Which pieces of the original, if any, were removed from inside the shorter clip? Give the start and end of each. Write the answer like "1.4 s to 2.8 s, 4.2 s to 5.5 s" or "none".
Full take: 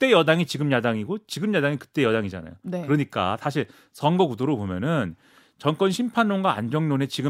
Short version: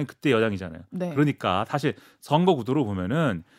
none